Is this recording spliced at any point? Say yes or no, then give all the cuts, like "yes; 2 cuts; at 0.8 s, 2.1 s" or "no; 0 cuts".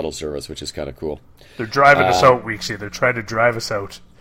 no; 0 cuts